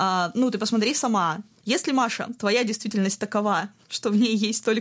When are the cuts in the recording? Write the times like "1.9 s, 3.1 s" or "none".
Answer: 1.6 s